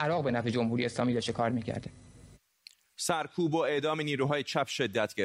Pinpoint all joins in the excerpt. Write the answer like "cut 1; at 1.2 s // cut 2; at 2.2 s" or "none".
none